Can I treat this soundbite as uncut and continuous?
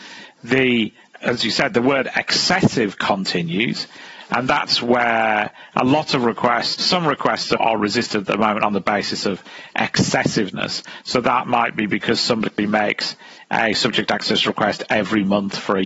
no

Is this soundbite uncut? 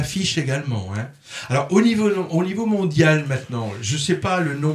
yes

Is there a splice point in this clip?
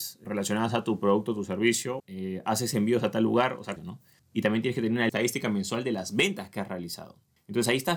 yes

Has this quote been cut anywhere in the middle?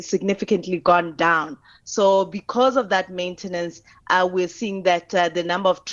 no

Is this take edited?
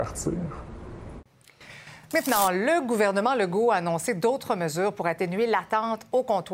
no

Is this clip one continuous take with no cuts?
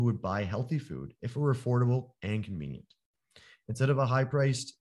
yes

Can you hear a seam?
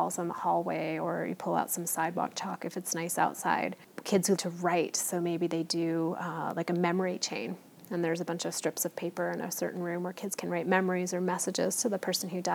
yes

